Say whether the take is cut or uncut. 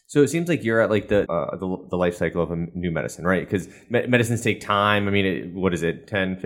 cut